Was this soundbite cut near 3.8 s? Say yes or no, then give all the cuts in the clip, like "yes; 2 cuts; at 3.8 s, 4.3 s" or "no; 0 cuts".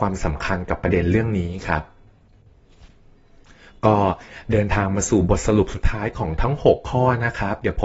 no; 0 cuts